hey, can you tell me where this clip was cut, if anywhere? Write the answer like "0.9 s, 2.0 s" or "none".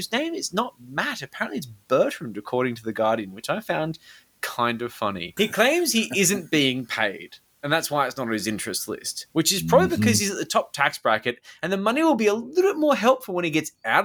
5.4 s

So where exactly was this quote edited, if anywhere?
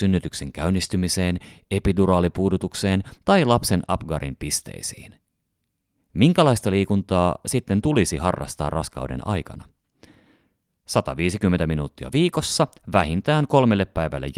none

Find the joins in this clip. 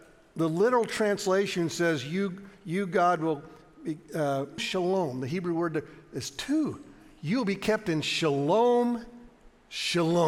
4.6 s

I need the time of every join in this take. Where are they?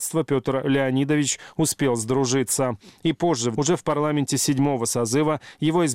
3.5 s

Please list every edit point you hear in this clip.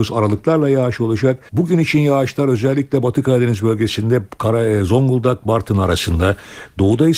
1.5 s

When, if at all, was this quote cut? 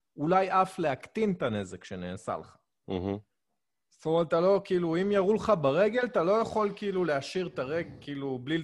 none

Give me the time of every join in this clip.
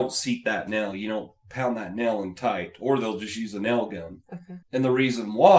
4.6 s

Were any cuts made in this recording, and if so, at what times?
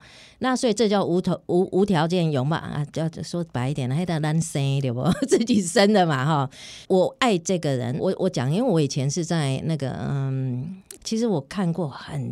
6.8 s, 8.0 s, 11.0 s

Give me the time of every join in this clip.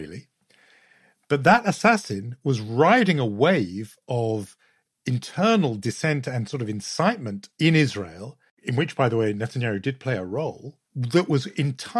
10.9 s

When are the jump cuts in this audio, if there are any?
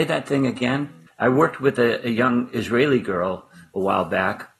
1.1 s

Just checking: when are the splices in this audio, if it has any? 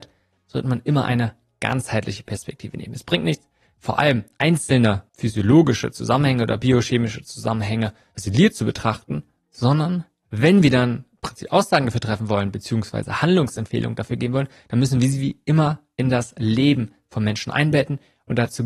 none

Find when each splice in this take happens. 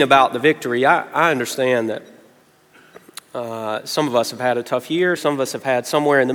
5.2 s

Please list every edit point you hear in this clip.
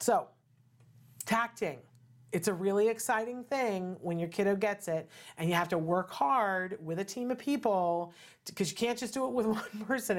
none

